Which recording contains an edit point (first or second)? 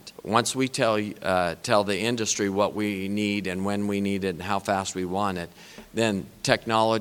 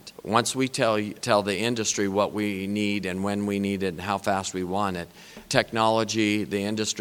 second